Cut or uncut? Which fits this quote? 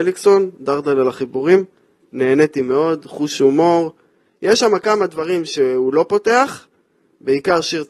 uncut